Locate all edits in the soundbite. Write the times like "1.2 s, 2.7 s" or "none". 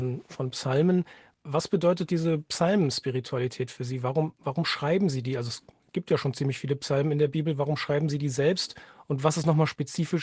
none